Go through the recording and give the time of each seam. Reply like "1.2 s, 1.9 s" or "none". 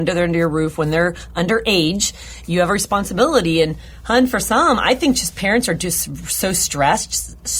none